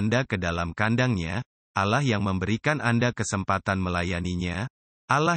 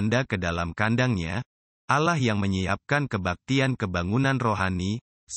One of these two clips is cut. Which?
second; 1 cut; at 1.7 s

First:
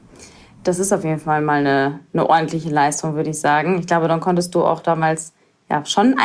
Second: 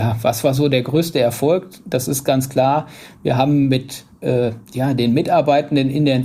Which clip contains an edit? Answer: second; 1 cut; at 4.6 s

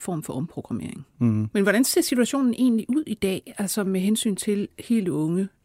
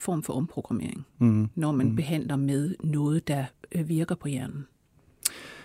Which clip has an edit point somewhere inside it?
first; 1 cut; at 1.5 s

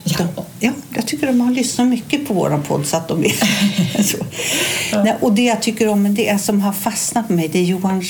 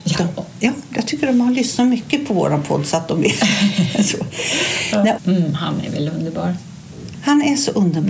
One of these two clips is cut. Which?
second; 1 cut; at 5.2 s

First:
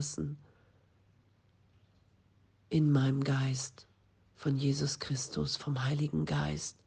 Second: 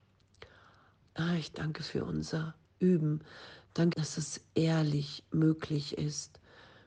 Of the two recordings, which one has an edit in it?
second; 2 cuts; at 1.0 s, 3.9 s

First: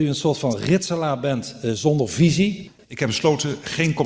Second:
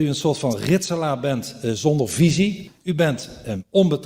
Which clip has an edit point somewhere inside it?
first; 1 cut; at 2.8 s

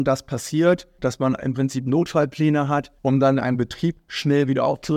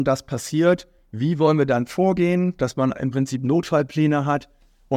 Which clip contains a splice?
first; 2 cuts; at 1.0 s, 3.0 s

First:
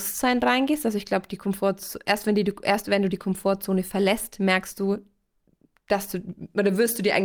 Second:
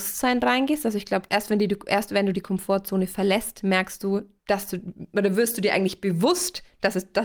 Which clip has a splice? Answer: second; 2 cuts; at 1.3 s, 4.4 s

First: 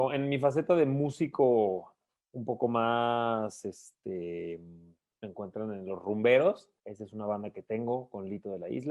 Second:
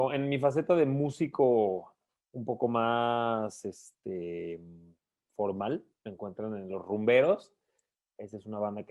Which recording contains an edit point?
first; 2 cuts; at 5.1 s, 6.8 s

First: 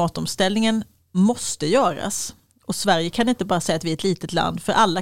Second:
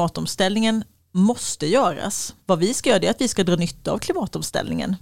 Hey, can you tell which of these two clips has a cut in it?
second; 1 cut; at 2.4 s

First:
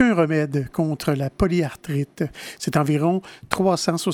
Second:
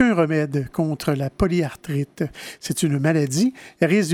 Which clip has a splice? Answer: first; 1 cut; at 2.6 s

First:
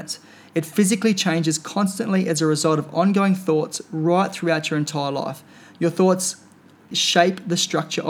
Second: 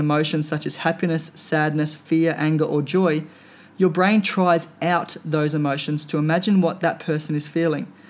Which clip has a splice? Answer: first; 1 cut; at 6.9 s

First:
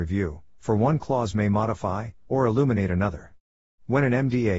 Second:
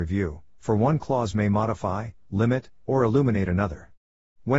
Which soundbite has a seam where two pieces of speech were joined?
first; 1 cut; at 2.3 s

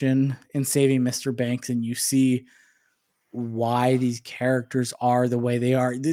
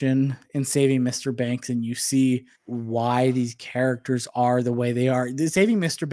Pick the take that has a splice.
second; 1 cut; at 2.5 s

